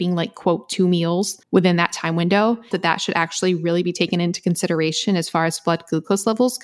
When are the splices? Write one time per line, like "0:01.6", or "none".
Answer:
0:01.4
0:02.7